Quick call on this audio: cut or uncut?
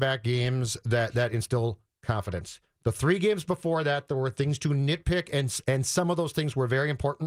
uncut